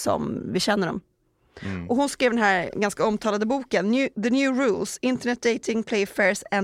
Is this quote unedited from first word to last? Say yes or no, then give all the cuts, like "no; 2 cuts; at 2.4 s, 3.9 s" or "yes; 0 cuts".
yes; 0 cuts